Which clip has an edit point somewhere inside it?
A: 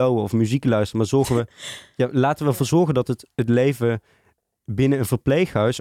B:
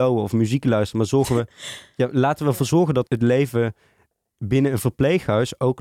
B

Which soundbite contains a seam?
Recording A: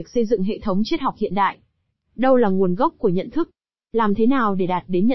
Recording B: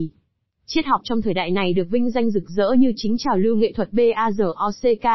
A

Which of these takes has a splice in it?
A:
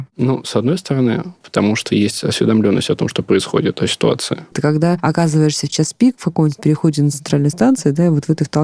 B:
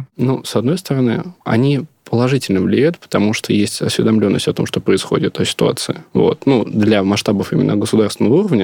A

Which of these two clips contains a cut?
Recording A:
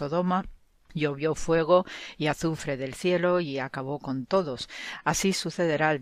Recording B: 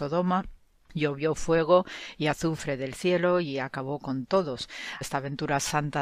B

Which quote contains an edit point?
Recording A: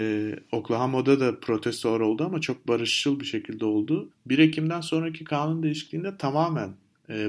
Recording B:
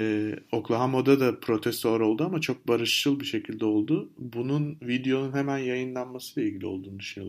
A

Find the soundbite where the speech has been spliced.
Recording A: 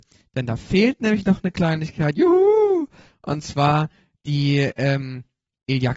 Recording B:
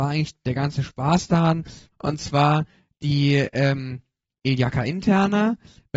B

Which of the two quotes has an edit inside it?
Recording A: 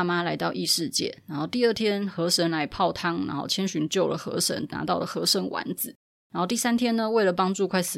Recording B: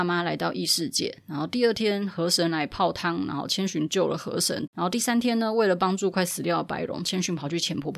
B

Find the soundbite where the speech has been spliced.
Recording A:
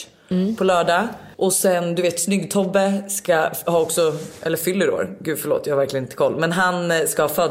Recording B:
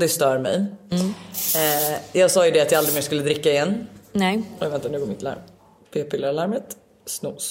A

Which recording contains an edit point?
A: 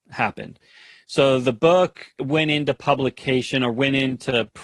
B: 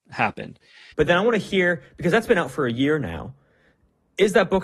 B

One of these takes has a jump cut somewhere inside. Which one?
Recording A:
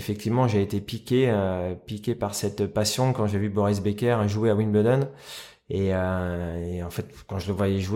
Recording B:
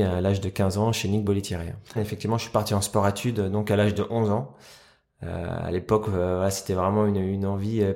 B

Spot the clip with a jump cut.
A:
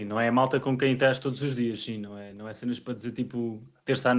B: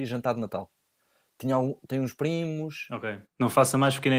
B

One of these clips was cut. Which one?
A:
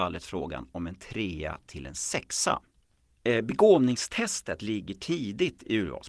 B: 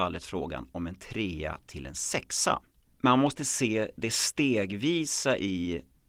B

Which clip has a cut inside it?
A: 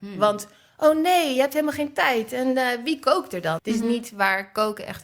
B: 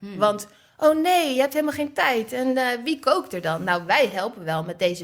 A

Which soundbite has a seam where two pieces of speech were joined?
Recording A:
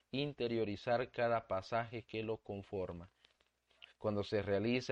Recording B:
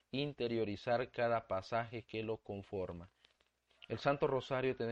A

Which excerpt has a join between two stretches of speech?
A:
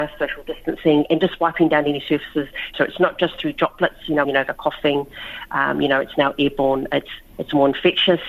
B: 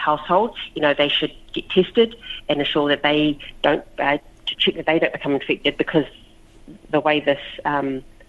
A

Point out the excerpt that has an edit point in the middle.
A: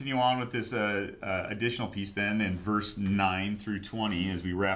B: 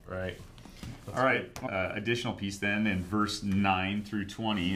B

